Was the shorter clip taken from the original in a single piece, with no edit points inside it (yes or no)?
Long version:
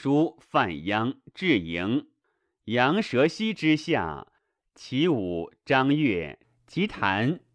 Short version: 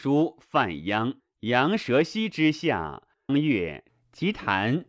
no